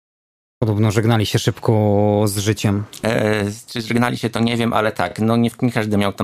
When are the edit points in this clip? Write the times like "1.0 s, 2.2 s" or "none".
none